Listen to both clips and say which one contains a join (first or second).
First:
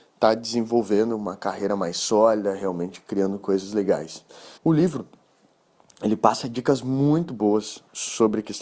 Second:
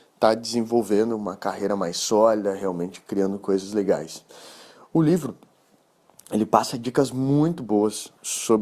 first